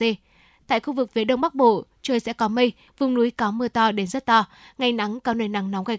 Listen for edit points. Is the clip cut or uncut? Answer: cut